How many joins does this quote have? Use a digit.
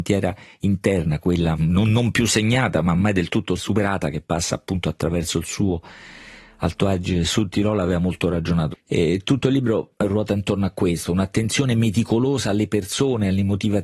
1